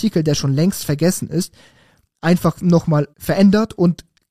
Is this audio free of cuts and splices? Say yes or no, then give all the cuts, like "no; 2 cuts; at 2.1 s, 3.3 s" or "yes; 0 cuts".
no; 1 cut; at 3.1 s